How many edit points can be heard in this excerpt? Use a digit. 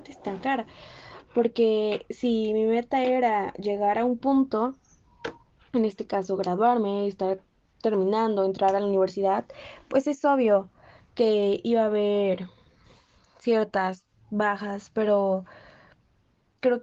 0